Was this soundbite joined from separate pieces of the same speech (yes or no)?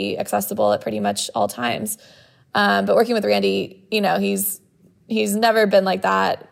no